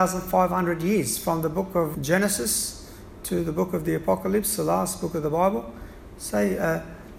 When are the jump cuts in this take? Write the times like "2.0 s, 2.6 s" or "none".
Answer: 1.9 s

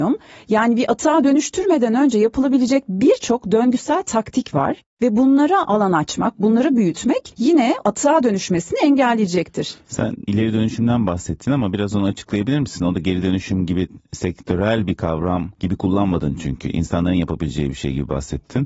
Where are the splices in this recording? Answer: none

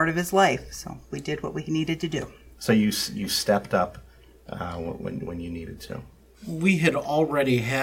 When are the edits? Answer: none

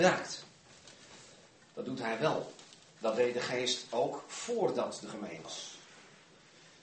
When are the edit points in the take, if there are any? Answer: 5.4 s

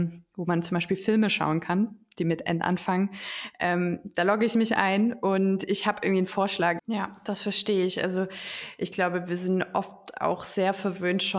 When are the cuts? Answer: 6.8 s

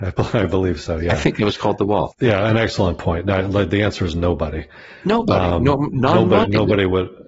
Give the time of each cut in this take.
2.1 s

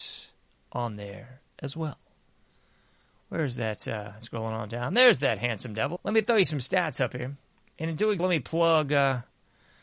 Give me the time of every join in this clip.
4.2 s, 6.0 s, 8.2 s

